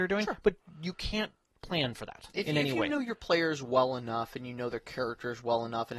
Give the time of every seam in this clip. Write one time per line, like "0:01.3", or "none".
none